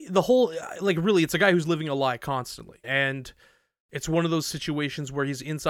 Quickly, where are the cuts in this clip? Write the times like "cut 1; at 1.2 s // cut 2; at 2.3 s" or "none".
cut 1; at 2.8 s